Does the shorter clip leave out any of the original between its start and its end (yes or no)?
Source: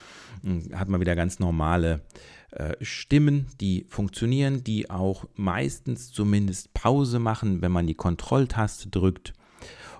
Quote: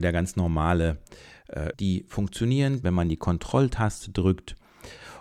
yes